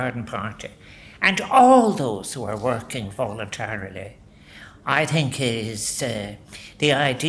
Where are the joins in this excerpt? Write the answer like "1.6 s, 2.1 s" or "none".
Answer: none